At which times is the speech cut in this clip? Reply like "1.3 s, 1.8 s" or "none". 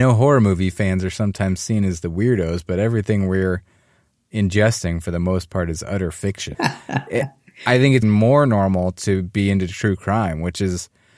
6.5 s, 8.0 s